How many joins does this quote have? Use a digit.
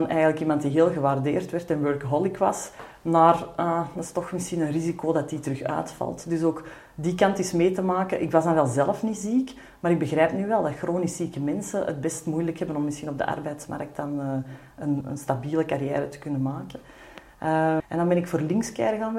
2